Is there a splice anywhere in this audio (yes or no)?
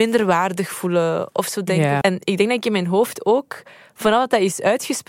yes